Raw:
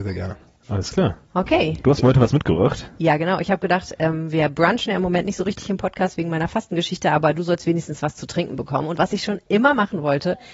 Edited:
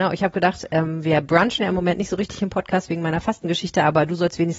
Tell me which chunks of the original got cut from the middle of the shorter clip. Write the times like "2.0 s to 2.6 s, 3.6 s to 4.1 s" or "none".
none